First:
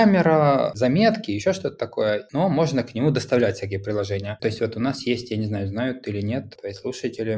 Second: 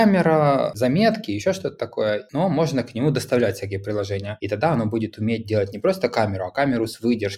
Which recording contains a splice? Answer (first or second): first